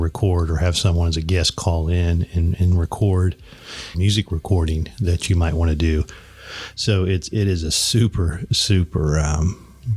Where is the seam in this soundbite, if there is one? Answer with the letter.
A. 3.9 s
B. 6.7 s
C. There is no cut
A